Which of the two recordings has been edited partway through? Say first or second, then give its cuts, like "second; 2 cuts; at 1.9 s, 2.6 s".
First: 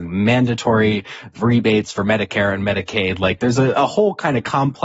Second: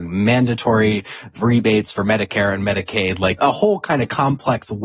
second; 1 cut; at 3.4 s